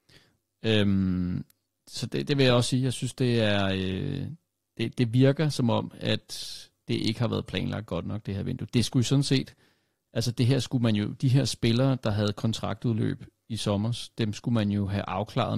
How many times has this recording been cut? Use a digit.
0